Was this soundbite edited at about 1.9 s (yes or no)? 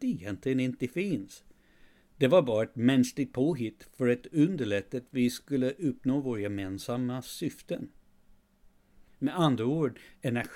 no